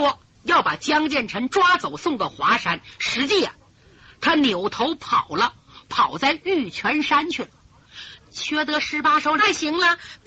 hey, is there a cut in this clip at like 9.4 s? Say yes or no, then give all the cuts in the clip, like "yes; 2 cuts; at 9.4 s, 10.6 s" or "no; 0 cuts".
yes; 2 cuts; at 8.2 s, 9.4 s